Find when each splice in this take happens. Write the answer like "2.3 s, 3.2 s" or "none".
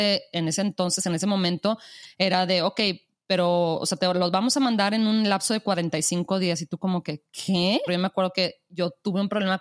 7.9 s